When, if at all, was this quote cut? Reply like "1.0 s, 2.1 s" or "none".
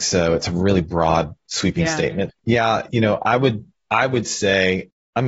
2.3 s